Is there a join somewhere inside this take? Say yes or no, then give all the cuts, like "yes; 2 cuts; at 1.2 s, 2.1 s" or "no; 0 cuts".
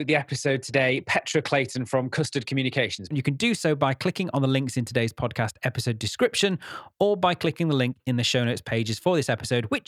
yes; 1 cut; at 3.1 s